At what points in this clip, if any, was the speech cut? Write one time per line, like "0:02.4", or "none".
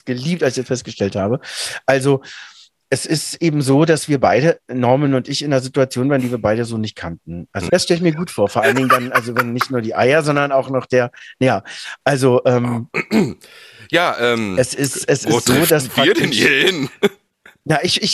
0:07.7